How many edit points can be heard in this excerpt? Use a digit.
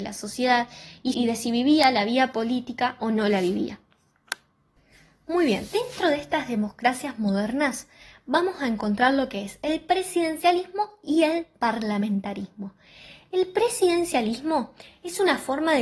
2